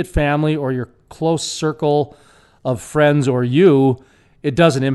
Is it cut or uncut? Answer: uncut